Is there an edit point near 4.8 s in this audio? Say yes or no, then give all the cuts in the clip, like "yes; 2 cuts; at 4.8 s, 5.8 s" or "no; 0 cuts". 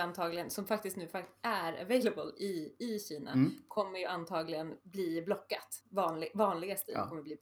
yes; 1 cut; at 4.8 s